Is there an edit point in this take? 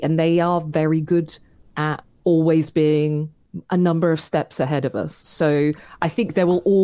no; 0 cuts

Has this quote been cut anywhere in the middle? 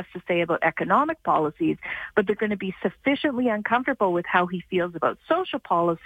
no; 0 cuts

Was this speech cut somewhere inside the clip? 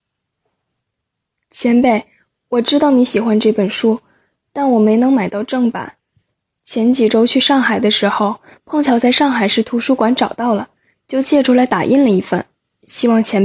no; 0 cuts

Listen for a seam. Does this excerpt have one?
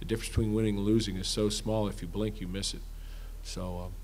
no; 0 cuts

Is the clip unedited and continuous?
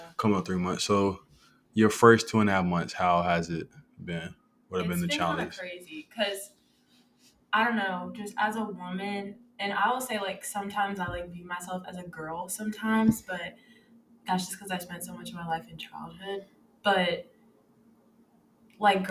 yes; 0 cuts

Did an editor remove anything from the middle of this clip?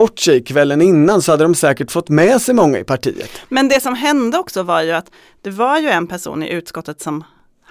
no; 0 cuts

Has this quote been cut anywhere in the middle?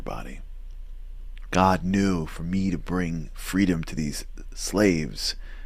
yes; 1 cut; at 1.5 s

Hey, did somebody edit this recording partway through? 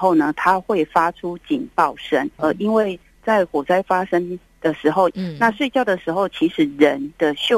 yes; 2 cuts; at 2.4 s, 5.1 s

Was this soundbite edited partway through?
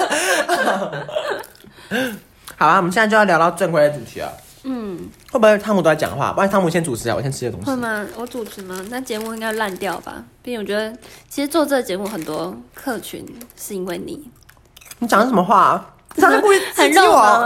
no; 0 cuts

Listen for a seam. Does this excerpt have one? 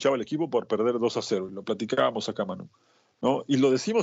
no; 0 cuts

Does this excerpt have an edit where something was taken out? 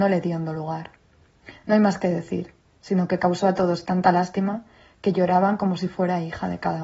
no; 0 cuts

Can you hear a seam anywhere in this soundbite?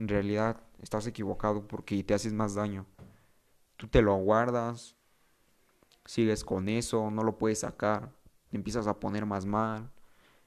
no; 0 cuts

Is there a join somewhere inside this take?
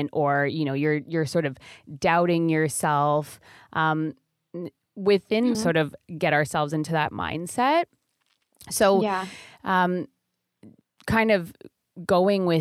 yes; 1 cut; at 5.5 s

